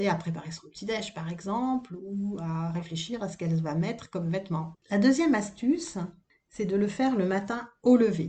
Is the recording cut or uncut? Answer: cut